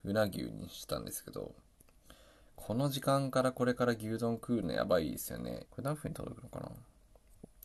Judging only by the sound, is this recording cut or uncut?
cut